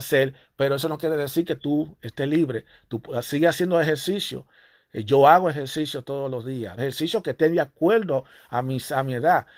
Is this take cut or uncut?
cut